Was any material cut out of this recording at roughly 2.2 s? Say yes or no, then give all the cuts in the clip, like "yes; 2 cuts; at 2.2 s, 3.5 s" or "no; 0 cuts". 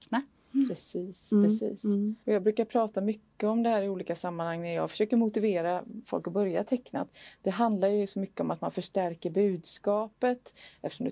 yes; 1 cut; at 2.2 s